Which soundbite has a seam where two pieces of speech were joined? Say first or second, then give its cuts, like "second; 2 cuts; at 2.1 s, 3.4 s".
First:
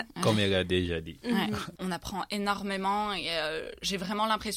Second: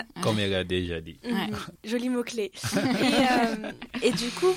first; 1 cut; at 1.8 s